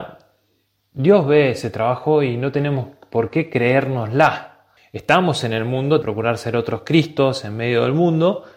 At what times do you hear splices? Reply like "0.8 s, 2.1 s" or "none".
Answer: 4.8 s, 6.0 s